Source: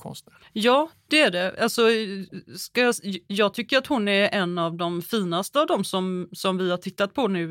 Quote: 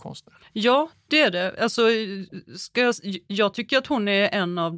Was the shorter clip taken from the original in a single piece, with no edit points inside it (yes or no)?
yes